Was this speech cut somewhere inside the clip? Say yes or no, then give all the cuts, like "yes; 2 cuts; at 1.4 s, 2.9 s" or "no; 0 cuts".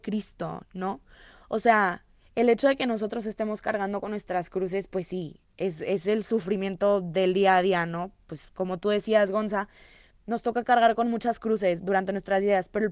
yes; 2 cuts; at 10.1 s, 11.8 s